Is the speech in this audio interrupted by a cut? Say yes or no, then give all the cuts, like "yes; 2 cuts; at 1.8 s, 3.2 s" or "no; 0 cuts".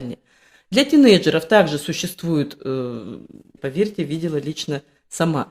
yes; 1 cut; at 3.6 s